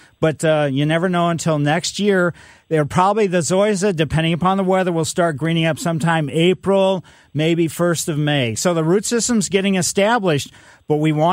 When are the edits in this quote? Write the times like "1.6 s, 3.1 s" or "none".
8.6 s